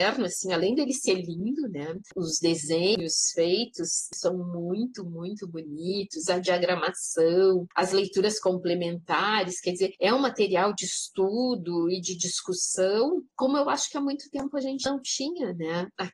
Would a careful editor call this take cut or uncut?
uncut